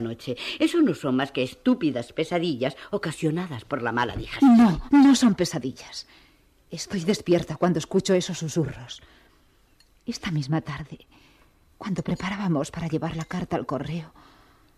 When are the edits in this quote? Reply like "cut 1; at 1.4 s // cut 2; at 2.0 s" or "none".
none